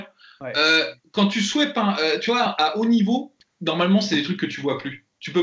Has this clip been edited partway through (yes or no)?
no